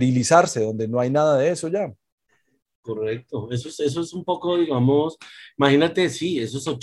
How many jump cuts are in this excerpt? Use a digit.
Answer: 0